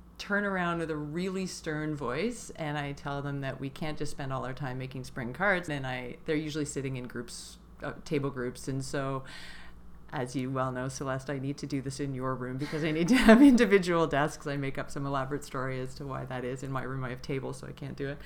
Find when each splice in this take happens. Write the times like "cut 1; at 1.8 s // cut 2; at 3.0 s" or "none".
cut 1; at 5.7 s

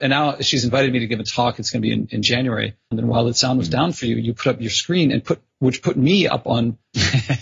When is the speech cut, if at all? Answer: cut 1; at 2.9 s

